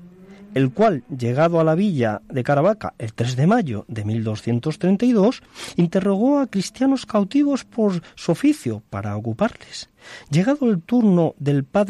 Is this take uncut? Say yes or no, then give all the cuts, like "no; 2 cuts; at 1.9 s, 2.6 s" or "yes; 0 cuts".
yes; 0 cuts